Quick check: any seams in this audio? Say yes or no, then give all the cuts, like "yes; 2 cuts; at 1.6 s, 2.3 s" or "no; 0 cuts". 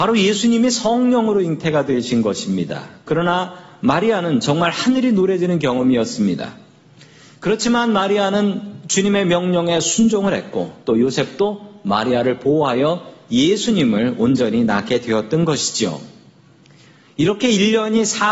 no; 0 cuts